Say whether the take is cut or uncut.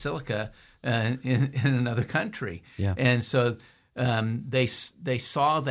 uncut